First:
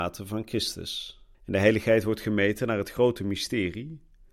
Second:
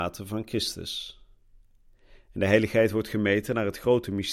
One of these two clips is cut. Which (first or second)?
first